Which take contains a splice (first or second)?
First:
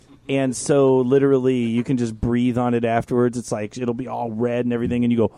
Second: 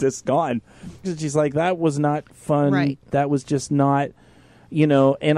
second